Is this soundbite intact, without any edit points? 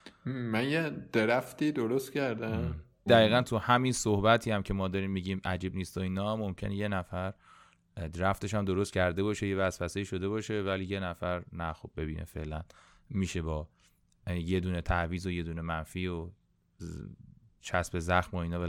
no; 1 cut; at 3.1 s

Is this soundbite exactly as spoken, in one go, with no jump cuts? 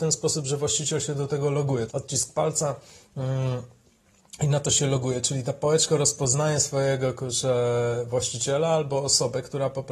no; 1 cut; at 1.9 s

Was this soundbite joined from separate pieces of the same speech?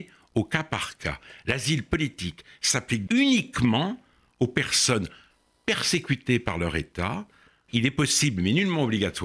yes; 2 cuts; at 3.1 s, 7.7 s

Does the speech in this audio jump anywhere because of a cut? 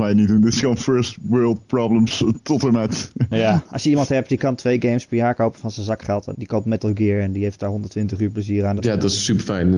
yes; 2 cuts; at 6.3 s, 8.8 s

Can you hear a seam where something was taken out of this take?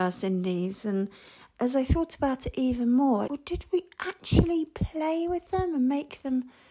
yes; 1 cut; at 3.3 s

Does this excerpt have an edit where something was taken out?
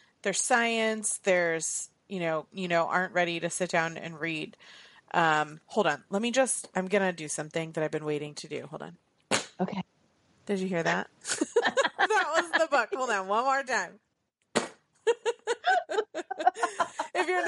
yes; 1 cut; at 2.5 s

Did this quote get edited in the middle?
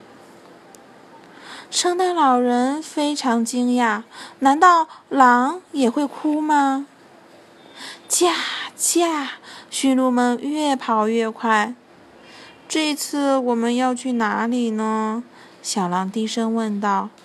no; 0 cuts

